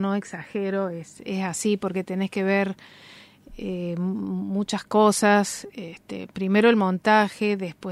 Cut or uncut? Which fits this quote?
uncut